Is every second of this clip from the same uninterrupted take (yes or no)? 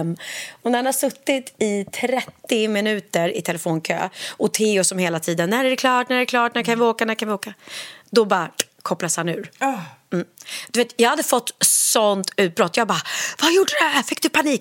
yes